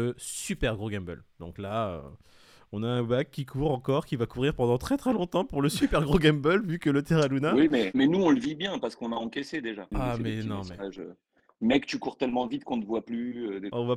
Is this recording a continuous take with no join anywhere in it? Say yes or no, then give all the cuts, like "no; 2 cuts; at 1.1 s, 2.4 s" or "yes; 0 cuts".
no; 1 cut; at 9.9 s